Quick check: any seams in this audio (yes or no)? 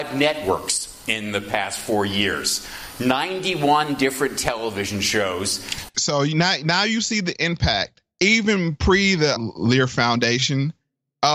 yes